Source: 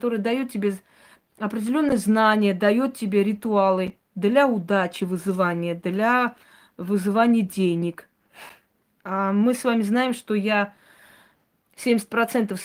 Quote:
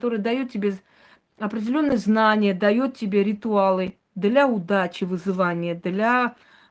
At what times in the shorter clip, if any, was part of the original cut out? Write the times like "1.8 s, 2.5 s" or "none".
none